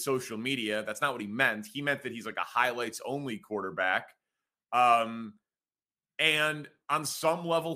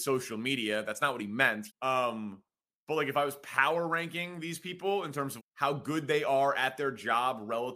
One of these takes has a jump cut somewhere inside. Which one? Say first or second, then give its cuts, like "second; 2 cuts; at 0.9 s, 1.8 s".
second; 2 cuts; at 1.7 s, 5.4 s